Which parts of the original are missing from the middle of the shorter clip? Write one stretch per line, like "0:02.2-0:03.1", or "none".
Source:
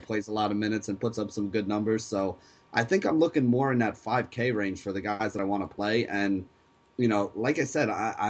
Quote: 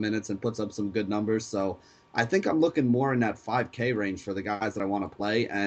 none